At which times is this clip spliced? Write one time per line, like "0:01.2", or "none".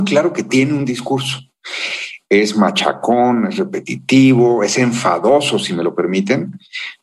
none